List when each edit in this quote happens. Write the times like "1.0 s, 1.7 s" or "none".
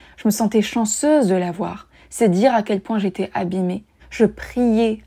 4.0 s